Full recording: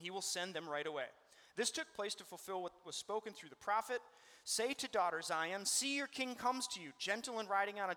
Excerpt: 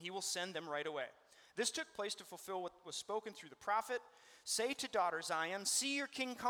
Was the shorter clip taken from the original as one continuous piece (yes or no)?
yes